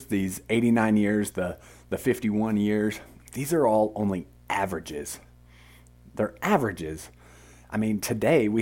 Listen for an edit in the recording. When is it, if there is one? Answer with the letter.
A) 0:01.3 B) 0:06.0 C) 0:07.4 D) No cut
A